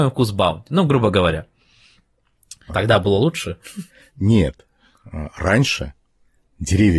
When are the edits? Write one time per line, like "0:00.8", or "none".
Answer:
0:02.7

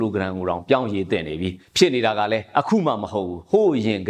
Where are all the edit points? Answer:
0:01.7

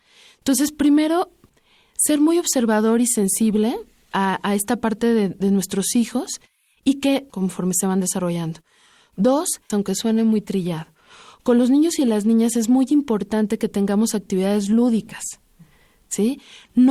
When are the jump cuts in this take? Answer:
0:07.3
0:09.7

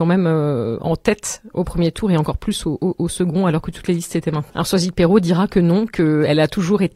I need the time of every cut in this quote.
0:04.5

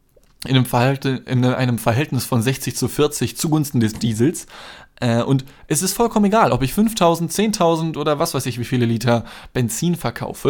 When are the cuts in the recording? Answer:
none

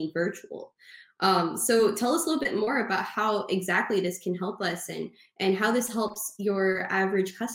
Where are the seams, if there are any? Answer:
none

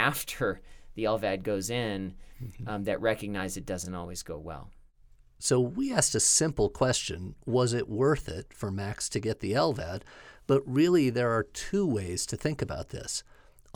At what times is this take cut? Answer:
none

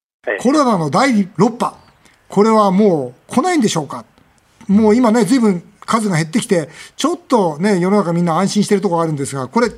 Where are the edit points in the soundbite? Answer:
none

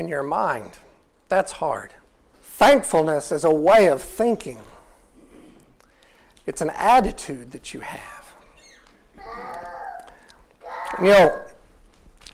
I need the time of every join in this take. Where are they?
0:02.3

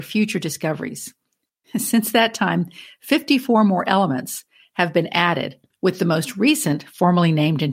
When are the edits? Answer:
none

